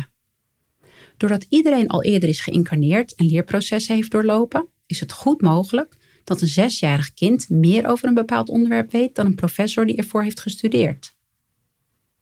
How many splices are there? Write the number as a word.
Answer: zero